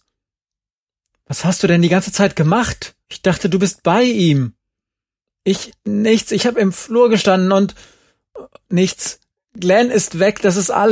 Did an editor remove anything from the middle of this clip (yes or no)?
yes